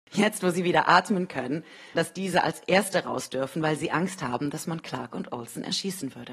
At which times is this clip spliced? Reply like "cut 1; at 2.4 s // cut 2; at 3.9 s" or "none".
cut 1; at 1.9 s